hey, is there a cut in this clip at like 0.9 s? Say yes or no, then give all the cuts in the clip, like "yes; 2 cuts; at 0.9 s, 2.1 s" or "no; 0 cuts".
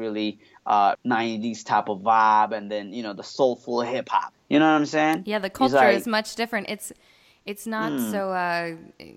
yes; 2 cuts; at 0.9 s, 4.3 s